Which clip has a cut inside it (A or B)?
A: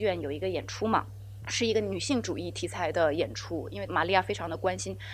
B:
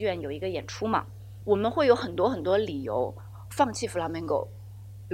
B